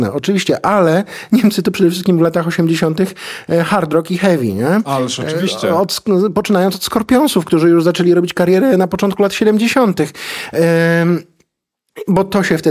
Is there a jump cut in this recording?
no; 0 cuts

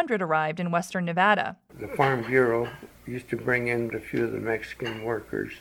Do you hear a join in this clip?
yes; 2 cuts; at 1.7 s, 3.9 s

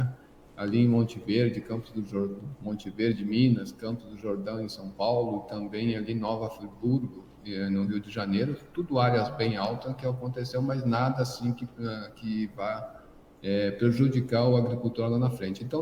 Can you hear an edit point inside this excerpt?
no; 0 cuts

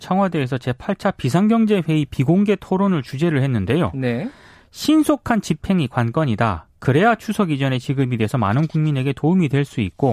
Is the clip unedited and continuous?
yes; 0 cuts

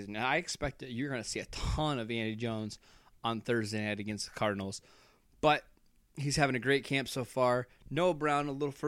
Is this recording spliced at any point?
no; 0 cuts

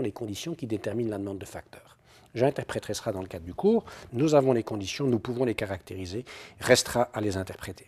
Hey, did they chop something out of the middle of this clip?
yes; 1 cut; at 4.1 s

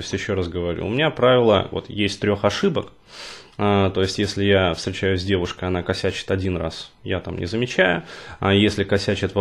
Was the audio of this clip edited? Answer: yes; 1 cut; at 1.7 s

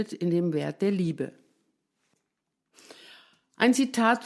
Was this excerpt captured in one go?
yes; 0 cuts

